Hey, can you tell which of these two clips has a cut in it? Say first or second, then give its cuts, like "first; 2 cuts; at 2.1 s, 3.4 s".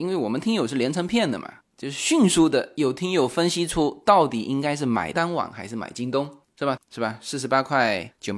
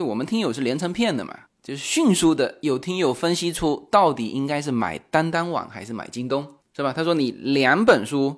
first; 2 cuts; at 5.1 s, 6.8 s